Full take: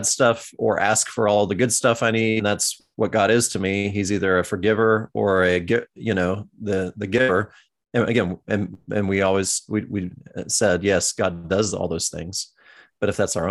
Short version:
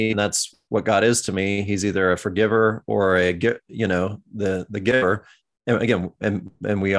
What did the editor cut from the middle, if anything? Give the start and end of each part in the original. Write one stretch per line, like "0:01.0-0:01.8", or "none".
none